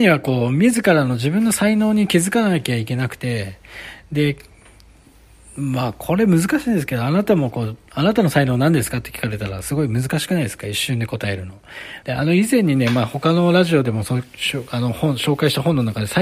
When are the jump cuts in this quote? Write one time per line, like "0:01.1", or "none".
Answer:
0:12.0